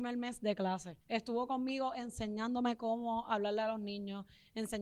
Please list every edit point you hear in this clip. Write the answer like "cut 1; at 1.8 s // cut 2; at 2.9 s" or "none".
cut 1; at 1.0 s